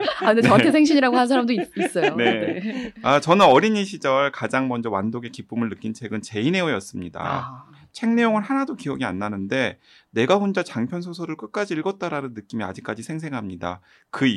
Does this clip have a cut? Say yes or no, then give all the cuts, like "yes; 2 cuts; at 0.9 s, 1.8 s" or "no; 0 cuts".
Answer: no; 0 cuts